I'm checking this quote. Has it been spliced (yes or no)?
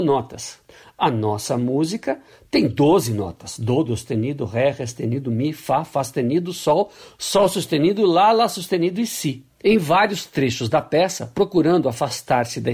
yes